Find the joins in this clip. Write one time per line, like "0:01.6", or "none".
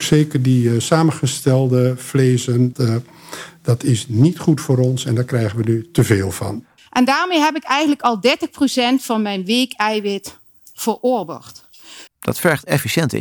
0:02.7
0:06.8
0:12.1